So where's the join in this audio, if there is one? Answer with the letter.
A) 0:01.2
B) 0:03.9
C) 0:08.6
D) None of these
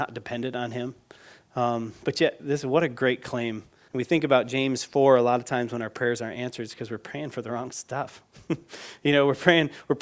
B